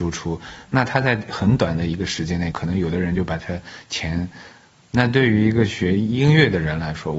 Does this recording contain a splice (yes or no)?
yes